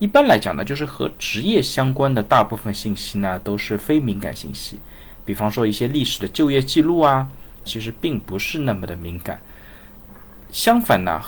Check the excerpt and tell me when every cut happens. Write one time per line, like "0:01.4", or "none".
0:07.7